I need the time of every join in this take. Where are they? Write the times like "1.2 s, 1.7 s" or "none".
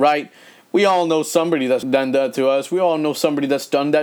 1.8 s